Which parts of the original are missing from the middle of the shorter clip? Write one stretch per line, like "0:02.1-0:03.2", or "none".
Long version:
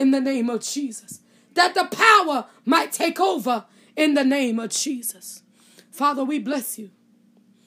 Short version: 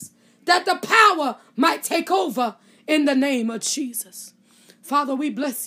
none